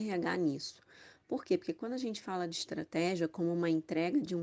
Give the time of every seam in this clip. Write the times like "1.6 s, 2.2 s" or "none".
none